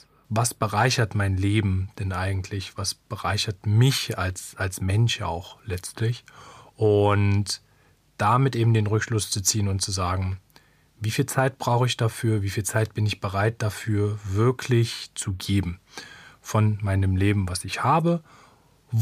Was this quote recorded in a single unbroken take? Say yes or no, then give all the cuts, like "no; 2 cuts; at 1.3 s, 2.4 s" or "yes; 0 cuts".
yes; 0 cuts